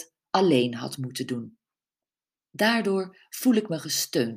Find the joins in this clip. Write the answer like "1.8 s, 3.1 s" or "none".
2.4 s